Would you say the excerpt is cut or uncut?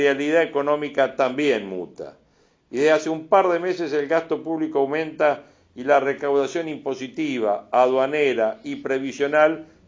uncut